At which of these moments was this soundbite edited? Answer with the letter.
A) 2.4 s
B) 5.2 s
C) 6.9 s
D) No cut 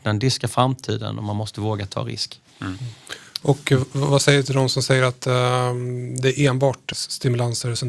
C